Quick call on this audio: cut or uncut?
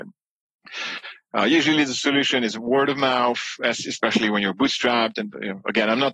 uncut